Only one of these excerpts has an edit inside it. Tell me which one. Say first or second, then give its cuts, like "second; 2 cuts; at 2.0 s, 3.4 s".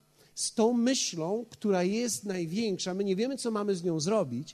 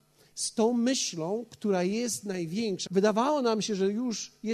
second; 1 cut; at 2.9 s